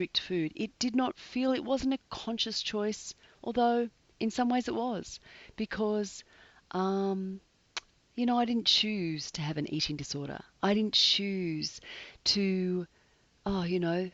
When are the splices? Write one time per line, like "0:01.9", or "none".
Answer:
none